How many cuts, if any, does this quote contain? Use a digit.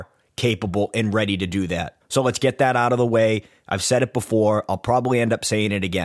1